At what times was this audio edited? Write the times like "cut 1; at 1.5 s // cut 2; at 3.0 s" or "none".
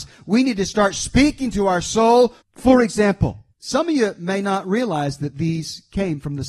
cut 1; at 2.4 s // cut 2; at 3.5 s